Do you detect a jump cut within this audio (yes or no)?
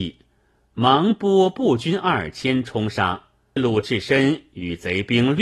yes